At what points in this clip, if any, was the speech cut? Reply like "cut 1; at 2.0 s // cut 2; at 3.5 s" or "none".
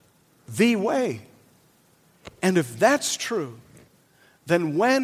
none